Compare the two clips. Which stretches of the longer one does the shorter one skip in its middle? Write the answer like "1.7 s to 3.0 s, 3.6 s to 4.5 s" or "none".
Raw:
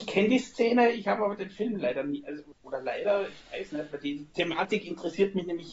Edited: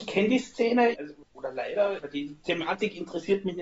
0.9 s to 2.2 s, 3.3 s to 3.9 s